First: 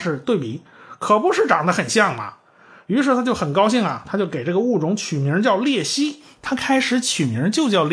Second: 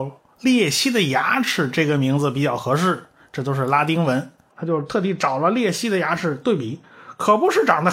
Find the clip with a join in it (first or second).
second